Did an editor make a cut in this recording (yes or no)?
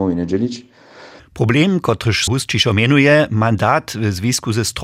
yes